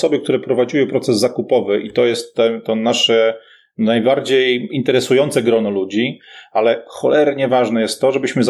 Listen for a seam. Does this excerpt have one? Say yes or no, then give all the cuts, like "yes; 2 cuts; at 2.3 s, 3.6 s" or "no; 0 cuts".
no; 0 cuts